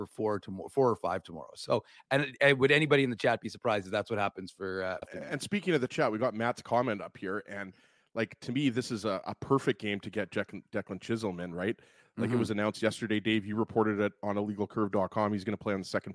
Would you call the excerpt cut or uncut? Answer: cut